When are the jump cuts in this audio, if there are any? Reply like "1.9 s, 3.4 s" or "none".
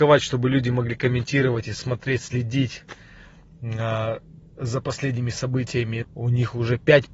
6.0 s